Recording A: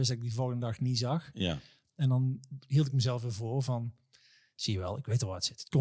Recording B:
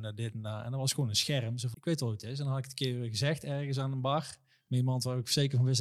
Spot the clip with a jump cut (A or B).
B